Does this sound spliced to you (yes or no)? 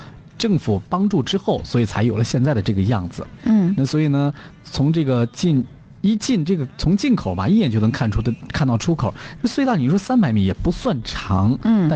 yes